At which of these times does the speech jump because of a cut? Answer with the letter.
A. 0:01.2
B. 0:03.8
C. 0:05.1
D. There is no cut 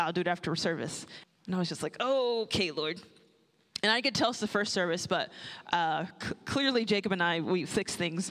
A